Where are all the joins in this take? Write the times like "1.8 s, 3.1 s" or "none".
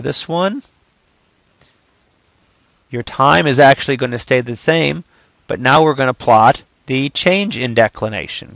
6.7 s